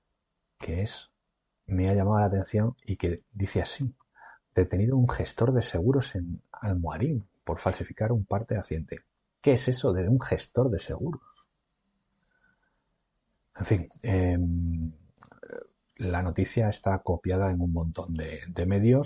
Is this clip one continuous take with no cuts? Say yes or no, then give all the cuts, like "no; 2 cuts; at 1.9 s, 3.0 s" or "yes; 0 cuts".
yes; 0 cuts